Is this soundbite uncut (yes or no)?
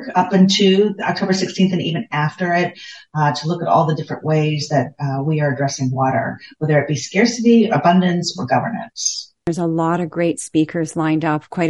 yes